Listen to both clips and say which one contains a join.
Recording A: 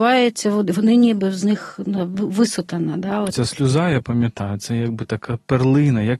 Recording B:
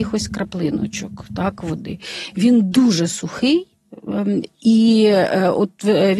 A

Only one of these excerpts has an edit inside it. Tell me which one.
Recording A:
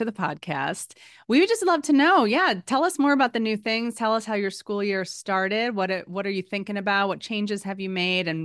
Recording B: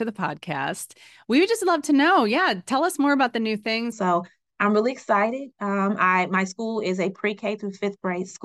B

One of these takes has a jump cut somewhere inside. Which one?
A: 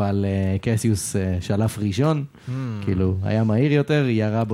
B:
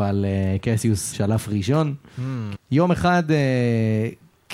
B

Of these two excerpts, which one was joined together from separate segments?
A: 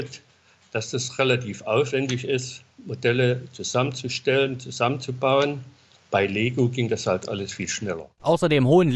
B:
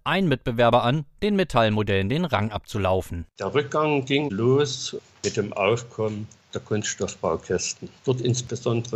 B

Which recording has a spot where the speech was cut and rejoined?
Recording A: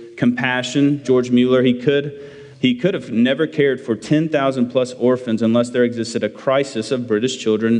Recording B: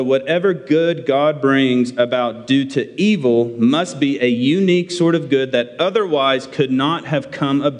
A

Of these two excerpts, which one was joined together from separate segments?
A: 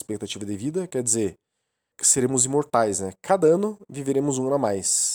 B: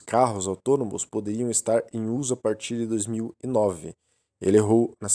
A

